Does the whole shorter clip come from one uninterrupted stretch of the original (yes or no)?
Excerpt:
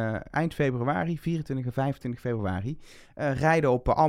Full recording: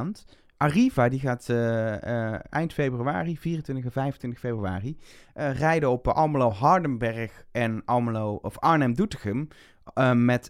yes